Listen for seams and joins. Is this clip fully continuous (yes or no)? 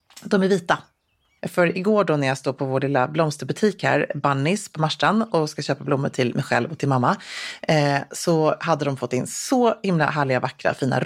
no